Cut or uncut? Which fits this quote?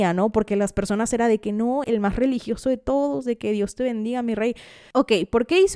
cut